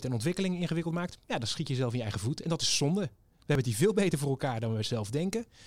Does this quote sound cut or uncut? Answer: uncut